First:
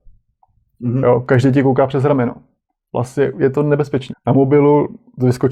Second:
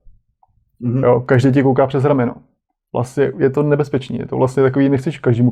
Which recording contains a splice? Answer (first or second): first